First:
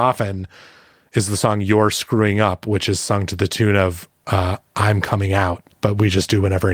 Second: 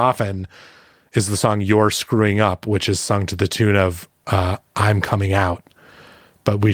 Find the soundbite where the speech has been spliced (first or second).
first